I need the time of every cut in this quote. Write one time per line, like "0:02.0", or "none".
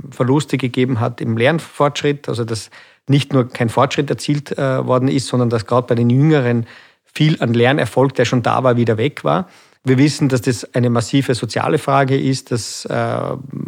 none